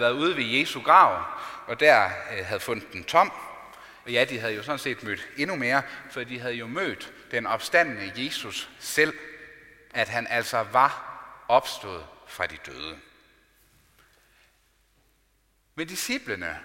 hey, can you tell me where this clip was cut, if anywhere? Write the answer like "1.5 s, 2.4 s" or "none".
4.0 s, 9.9 s